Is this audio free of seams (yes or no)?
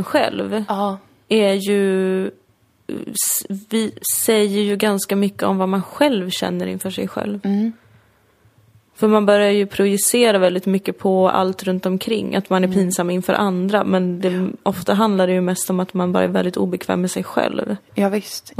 yes